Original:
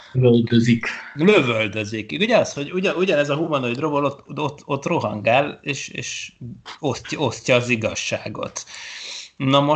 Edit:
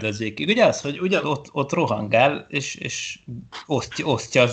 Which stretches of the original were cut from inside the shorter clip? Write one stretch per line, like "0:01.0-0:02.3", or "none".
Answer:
0:02.9-0:04.3